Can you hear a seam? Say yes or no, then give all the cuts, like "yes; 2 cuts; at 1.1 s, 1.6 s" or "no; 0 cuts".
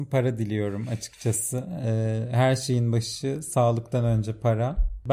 no; 0 cuts